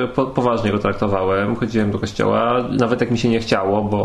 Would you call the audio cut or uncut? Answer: uncut